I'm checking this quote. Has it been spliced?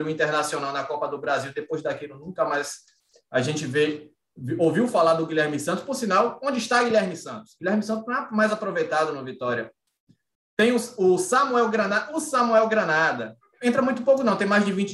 yes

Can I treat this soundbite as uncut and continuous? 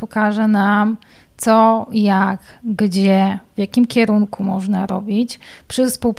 yes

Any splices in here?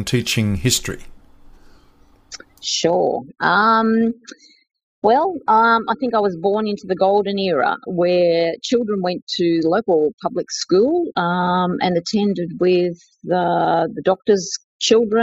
no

